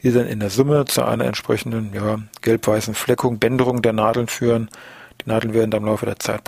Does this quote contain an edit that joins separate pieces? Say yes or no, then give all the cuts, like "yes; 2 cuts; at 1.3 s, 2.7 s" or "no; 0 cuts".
no; 0 cuts